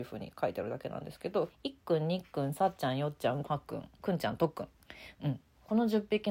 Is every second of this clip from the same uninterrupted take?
no; 2 cuts; at 1.5 s, 3.4 s

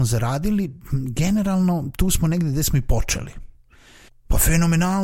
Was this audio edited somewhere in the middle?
yes; 1 cut; at 4.1 s

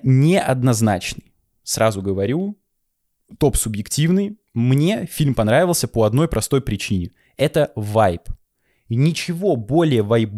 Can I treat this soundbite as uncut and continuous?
yes; 0 cuts

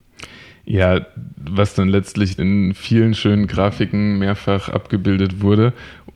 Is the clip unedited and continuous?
no; 1 cut; at 2.4 s

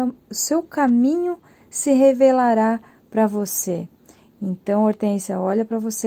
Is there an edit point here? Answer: no; 0 cuts

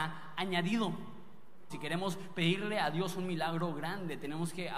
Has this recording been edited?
yes; 1 cut; at 1.7 s

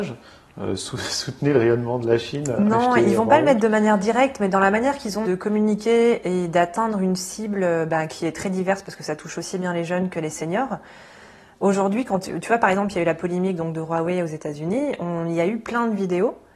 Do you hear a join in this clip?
yes; 1 cut; at 5.2 s

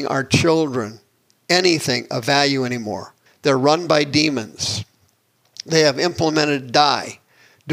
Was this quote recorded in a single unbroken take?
no; 1 cut; at 3.3 s

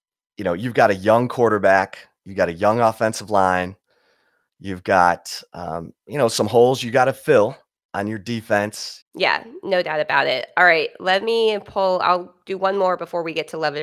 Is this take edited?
yes; 1 cut; at 9.0 s

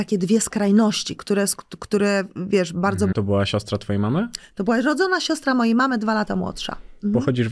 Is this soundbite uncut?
no; 1 cut; at 3.1 s

